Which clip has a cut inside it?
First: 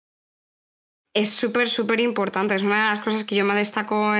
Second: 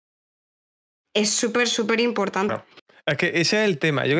second; 1 cut; at 2.5 s

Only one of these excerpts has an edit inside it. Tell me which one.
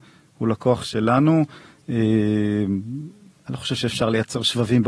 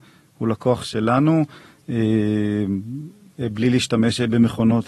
second; 1 cut; at 3.3 s

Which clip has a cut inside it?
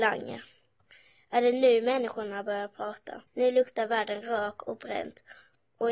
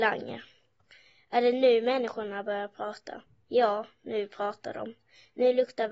first; 1 cut; at 3.3 s

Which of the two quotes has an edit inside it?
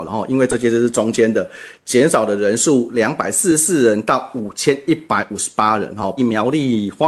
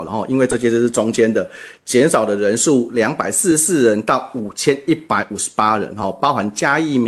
first; 1 cut; at 6.2 s

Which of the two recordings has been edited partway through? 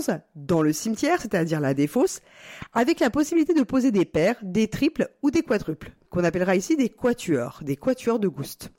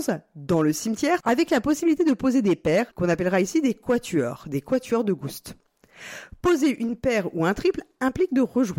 second; 2 cuts; at 1.2 s, 2.9 s

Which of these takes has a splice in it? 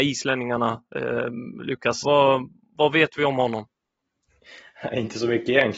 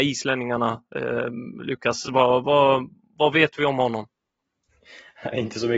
first; 1 cut; at 2.0 s

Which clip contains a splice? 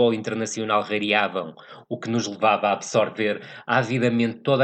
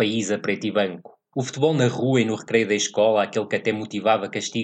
second; 1 cut; at 1.3 s

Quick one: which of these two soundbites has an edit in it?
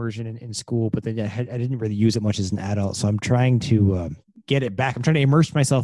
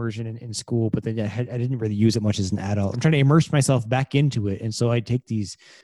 second; 1 cut; at 2.9 s

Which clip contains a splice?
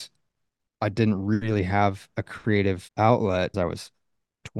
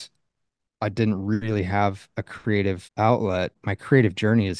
first; 1 cut; at 3.5 s

